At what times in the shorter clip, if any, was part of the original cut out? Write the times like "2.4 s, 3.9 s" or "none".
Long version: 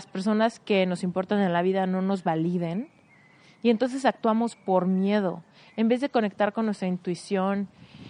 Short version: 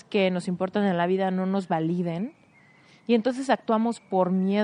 none